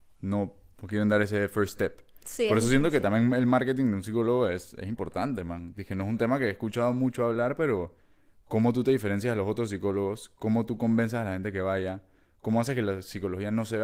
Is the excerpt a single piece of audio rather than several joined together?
yes; 0 cuts

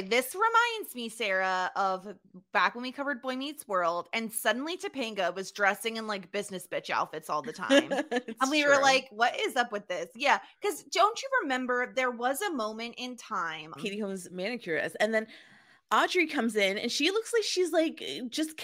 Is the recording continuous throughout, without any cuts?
no; 1 cut; at 13.8 s

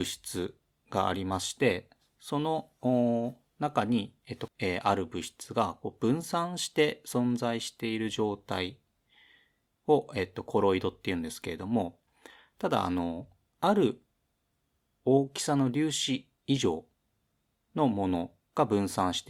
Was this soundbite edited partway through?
yes; 1 cut; at 4.5 s

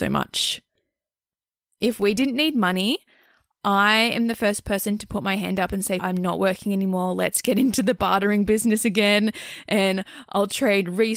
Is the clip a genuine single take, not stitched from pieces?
no; 1 cut; at 6.0 s

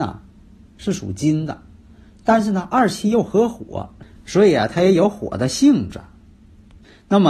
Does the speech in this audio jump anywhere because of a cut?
no; 0 cuts

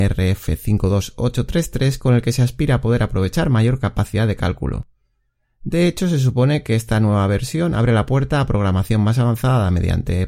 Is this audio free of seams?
yes; 0 cuts

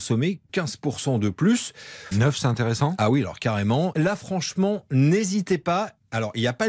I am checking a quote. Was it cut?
yes; 2 cuts; at 2.1 s, 3.9 s

